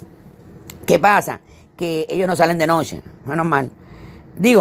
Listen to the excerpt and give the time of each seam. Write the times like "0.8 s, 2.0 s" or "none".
none